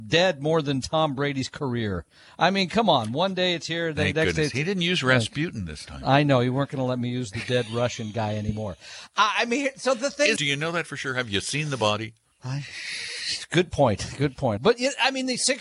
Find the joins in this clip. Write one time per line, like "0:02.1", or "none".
0:10.4
0:14.6